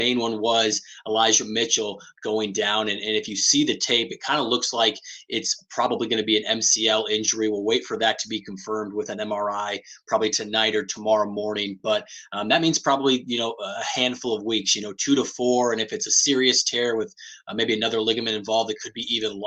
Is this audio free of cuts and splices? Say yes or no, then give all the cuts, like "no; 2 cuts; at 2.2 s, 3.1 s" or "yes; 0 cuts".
yes; 0 cuts